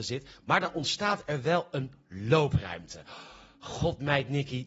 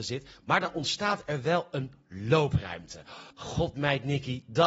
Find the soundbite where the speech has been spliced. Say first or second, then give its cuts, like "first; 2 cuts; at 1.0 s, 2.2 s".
second; 1 cut; at 3.3 s